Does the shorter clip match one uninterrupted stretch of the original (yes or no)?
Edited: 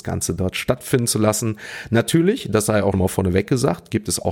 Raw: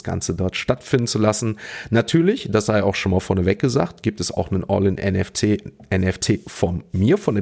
no